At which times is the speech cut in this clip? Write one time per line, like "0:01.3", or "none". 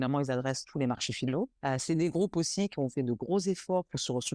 0:01.5